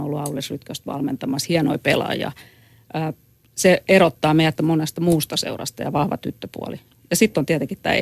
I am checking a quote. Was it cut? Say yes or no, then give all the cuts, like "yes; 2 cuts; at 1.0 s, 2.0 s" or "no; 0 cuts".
yes; 1 cut; at 4.6 s